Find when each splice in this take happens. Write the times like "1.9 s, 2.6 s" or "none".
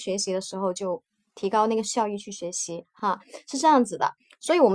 none